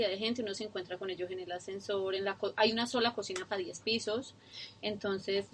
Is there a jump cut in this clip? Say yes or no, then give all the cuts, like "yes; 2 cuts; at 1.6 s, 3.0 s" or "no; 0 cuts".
no; 0 cuts